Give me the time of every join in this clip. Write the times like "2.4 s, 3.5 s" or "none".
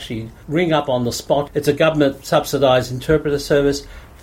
none